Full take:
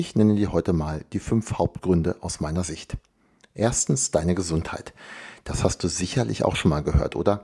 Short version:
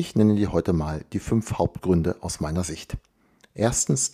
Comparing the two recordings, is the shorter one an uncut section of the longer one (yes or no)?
yes